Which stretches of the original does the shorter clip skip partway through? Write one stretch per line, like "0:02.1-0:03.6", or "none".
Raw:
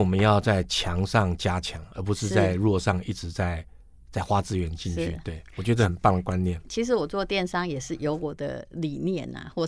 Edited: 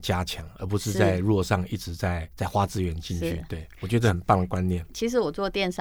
0:03.7-0:04.1